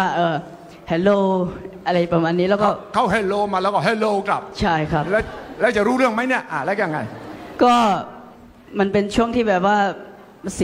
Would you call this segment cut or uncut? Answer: uncut